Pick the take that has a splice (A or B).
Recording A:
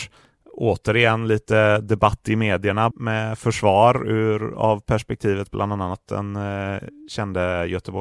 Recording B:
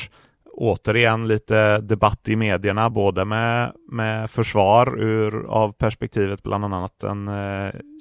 A